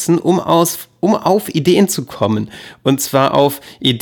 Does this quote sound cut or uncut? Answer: uncut